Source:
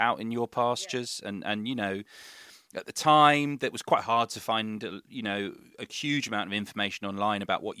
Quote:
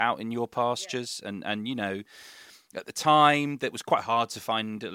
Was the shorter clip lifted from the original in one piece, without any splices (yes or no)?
yes